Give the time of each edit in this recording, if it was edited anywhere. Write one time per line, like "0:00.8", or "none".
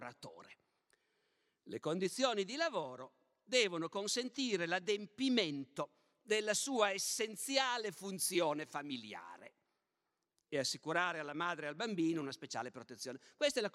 none